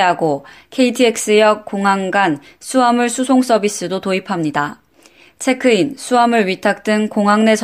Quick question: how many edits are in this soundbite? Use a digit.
0